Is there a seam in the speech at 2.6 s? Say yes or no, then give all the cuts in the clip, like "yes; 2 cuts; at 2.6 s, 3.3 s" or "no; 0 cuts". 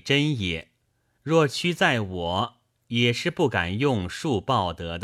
no; 1 cut; at 1.2 s